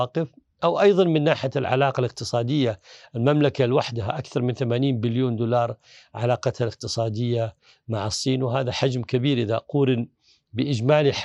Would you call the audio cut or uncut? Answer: uncut